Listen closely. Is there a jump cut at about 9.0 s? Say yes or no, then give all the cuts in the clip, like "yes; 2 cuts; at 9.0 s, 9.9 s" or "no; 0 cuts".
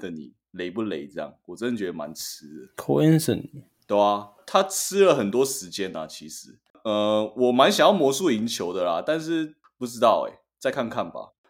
no; 0 cuts